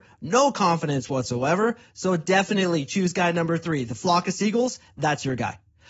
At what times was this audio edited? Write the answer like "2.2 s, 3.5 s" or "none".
none